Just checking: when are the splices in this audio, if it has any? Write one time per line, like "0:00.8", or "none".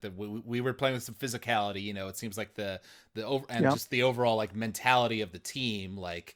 none